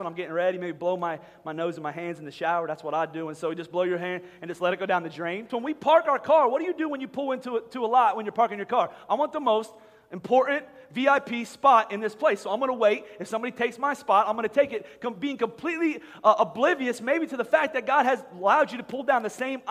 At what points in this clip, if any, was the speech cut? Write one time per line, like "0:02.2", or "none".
0:05.5